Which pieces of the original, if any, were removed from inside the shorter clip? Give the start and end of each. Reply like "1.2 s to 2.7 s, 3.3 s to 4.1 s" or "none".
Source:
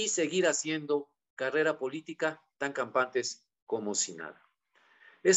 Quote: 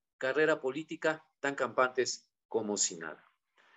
none